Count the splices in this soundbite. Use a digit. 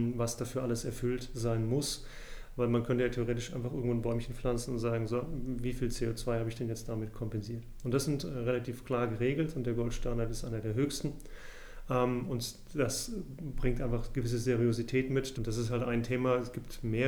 1